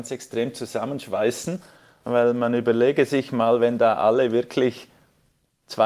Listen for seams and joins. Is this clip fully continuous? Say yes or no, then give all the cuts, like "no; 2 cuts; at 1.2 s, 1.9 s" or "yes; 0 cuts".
yes; 0 cuts